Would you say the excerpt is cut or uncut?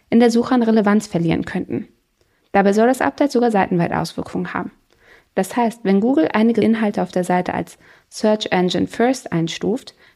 uncut